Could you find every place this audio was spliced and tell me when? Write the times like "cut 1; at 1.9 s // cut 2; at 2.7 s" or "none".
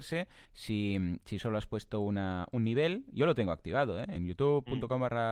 none

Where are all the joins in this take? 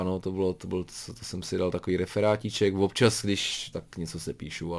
cut 1; at 3.7 s

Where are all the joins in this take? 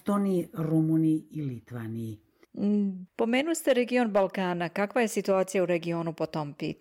cut 1; at 3.1 s

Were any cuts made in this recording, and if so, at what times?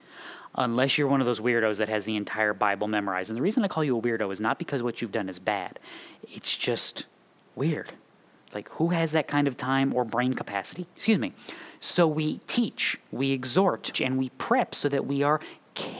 cut 1; at 10.9 s // cut 2; at 13.9 s

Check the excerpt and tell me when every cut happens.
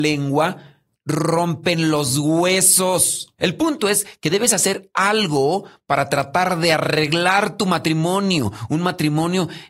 cut 1; at 3.4 s

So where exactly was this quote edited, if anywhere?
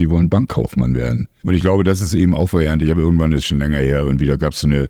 cut 1; at 1.4 s

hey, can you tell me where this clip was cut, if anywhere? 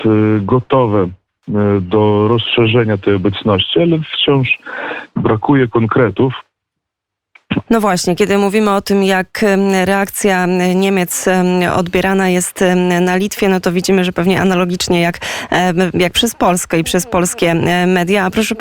cut 1; at 7.6 s

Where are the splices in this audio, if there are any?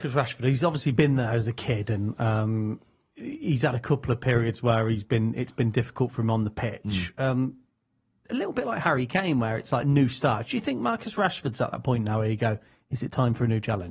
none

